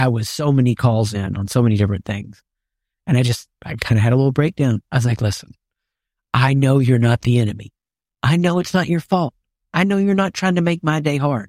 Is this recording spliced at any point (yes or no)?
no